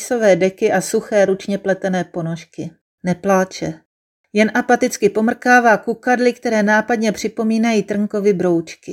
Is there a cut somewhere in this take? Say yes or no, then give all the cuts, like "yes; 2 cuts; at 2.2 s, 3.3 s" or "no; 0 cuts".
yes; 2 cuts; at 1.3 s, 2.9 s